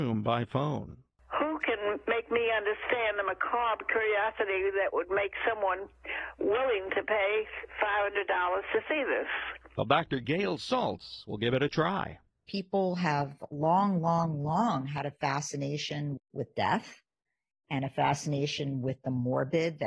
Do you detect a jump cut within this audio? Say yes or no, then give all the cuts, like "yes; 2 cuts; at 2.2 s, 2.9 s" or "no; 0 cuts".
yes; 1 cut; at 16.2 s